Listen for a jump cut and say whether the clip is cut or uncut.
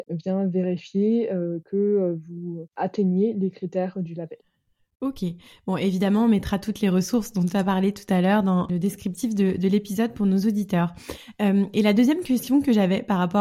uncut